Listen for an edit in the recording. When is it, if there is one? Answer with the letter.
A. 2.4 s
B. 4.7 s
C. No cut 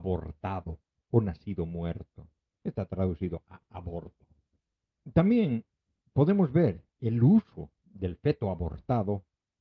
C